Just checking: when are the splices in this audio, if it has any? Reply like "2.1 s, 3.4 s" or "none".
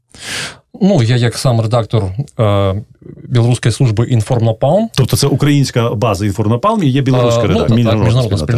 7.7 s